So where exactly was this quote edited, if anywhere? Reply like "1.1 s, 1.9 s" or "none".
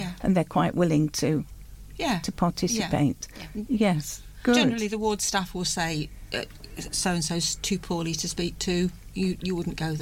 none